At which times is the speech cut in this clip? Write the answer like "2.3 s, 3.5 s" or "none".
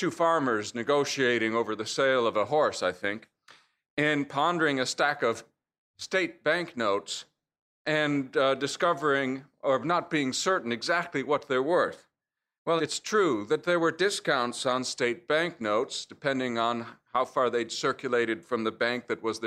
12.8 s